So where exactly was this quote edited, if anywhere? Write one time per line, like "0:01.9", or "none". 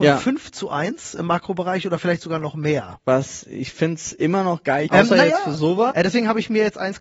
0:04.9
0:05.9

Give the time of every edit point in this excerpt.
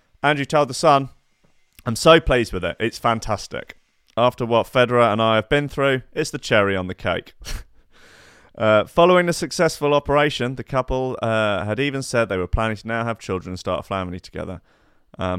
none

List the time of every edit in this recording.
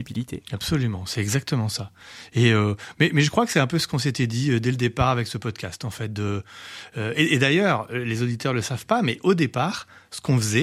none

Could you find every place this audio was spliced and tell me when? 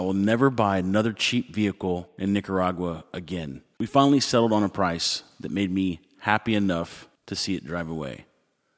0:03.7
0:07.2

